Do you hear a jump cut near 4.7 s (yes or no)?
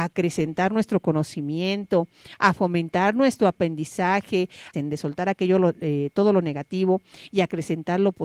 yes